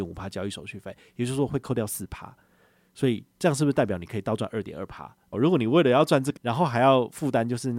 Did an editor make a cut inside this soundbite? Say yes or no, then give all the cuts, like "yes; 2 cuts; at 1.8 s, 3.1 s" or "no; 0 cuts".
yes; 3 cuts; at 3.3 s, 5.3 s, 6.4 s